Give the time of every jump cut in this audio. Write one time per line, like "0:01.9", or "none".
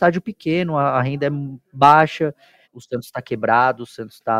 0:02.6